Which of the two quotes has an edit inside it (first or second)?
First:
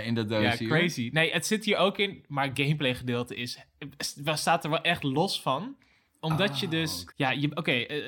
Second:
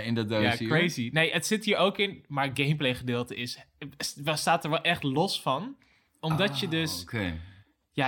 first